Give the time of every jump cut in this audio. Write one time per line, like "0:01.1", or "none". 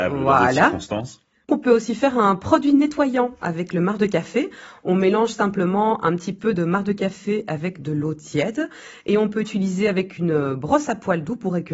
0:01.5